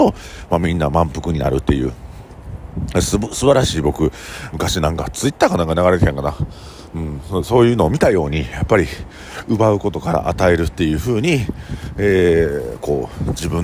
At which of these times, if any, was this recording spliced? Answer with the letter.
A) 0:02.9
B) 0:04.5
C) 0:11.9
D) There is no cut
B